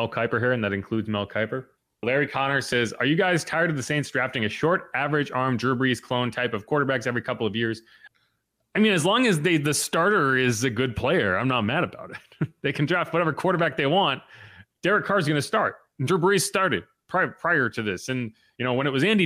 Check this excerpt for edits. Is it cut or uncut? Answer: uncut